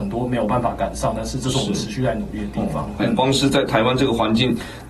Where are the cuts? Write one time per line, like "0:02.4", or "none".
0:03.0